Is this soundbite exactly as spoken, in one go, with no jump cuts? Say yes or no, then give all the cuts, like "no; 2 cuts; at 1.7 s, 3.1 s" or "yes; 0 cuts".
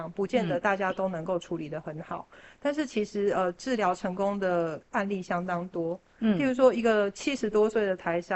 yes; 0 cuts